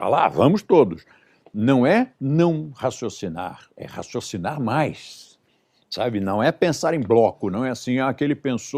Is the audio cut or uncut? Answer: uncut